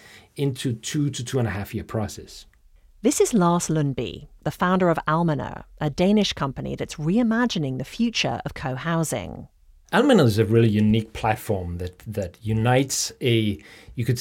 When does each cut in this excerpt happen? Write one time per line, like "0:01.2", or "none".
none